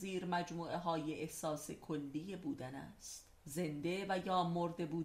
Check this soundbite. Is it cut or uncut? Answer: cut